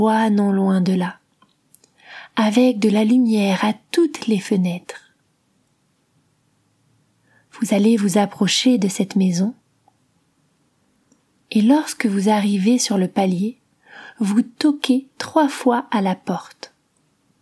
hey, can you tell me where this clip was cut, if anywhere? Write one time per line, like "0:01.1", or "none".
none